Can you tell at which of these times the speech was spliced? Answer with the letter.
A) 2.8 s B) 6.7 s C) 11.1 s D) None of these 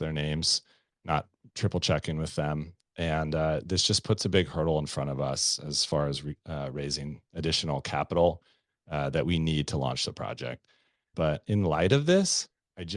C